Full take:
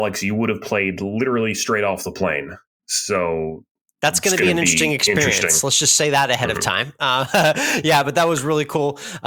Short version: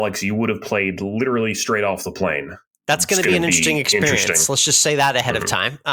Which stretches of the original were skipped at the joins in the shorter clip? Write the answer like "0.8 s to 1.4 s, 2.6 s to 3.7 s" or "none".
2.7 s to 3.8 s